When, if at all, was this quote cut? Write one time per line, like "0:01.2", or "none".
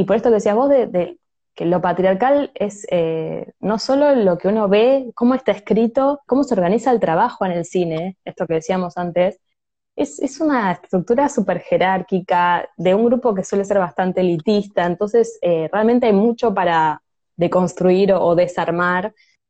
0:06.3